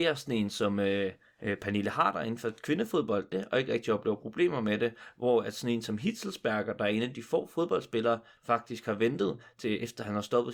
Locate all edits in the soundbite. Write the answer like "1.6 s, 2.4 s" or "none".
3.3 s, 8.4 s